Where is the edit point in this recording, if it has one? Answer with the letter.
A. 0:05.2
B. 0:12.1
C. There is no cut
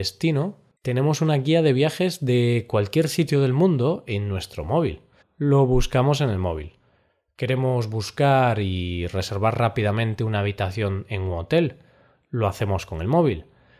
A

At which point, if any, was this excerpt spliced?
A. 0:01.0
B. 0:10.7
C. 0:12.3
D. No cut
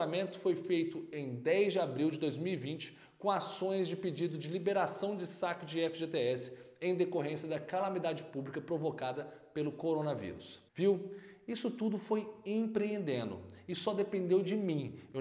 B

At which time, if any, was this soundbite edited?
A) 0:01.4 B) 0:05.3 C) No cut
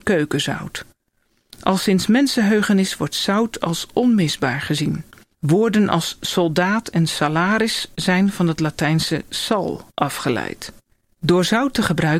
B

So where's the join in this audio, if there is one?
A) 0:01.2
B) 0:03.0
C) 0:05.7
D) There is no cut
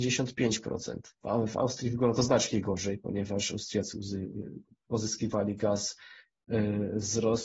A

